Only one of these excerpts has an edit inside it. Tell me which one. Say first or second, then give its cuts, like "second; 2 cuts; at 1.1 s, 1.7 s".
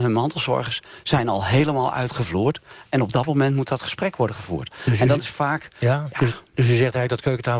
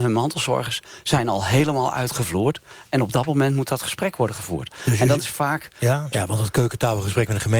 second; 1 cut; at 6.1 s